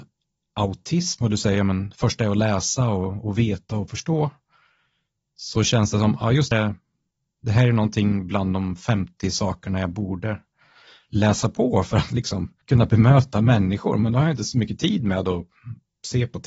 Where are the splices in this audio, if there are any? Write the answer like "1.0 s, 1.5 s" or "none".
6.5 s, 12.6 s